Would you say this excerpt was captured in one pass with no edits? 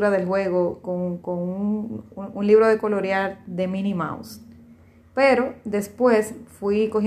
yes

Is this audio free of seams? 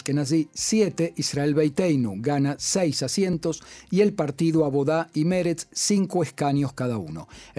yes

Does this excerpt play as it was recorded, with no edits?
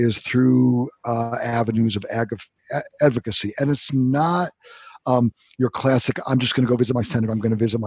yes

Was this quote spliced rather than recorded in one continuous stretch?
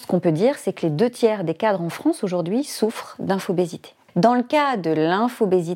yes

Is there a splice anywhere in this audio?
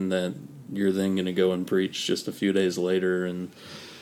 no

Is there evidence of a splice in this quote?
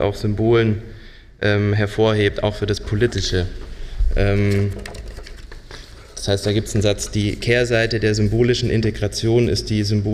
no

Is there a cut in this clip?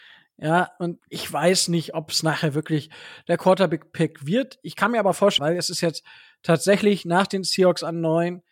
yes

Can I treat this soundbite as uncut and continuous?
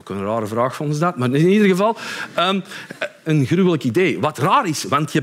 no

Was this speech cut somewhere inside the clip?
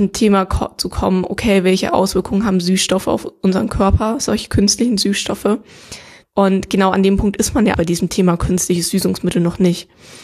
yes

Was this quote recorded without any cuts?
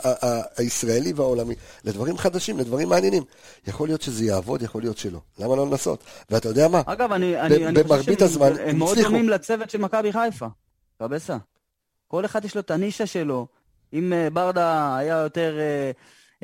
yes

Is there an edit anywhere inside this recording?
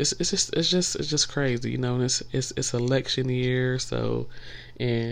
no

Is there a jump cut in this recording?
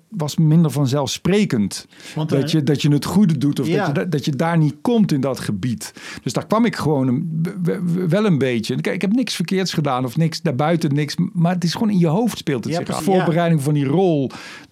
yes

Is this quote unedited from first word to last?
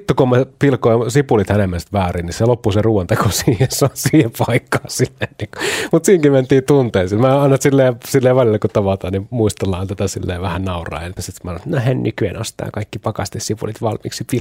no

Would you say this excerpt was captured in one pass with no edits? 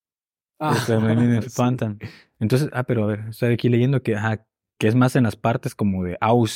yes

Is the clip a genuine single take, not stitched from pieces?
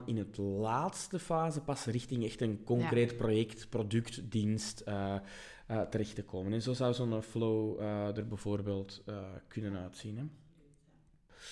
yes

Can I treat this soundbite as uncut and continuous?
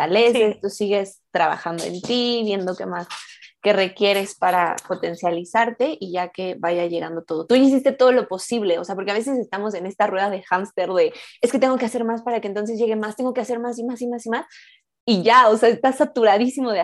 yes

